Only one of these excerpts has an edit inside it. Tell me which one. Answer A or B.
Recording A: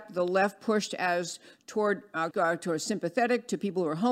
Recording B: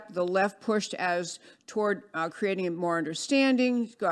A